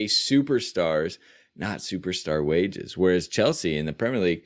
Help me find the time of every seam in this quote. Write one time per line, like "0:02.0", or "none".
none